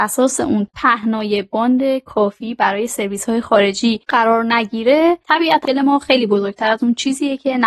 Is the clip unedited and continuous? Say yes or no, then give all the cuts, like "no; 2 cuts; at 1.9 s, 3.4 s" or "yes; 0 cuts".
no; 1 cut; at 5.6 s